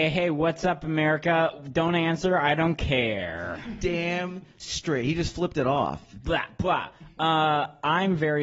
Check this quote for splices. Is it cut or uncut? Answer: uncut